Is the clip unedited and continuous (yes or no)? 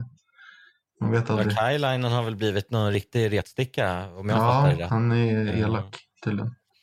yes